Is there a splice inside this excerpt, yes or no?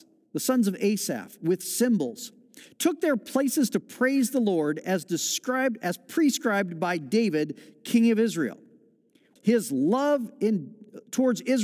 yes